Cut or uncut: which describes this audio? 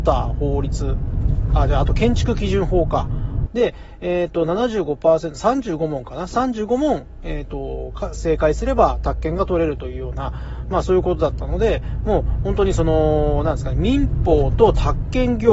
cut